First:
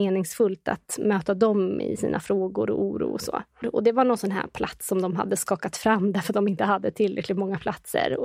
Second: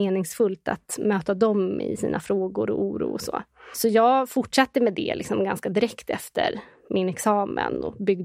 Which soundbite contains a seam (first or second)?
first